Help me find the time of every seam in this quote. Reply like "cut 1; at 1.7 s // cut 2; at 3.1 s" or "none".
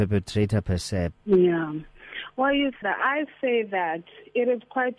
cut 1; at 1.1 s // cut 2; at 2.8 s